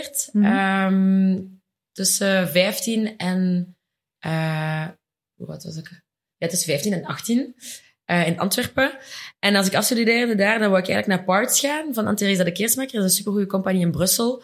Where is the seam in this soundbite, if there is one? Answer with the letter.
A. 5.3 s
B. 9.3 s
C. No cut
A